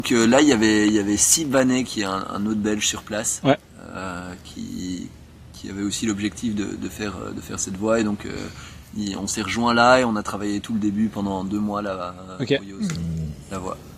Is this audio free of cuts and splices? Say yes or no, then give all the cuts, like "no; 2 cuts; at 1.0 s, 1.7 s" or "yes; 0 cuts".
yes; 0 cuts